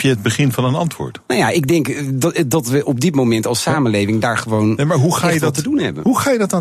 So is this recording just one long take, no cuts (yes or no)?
no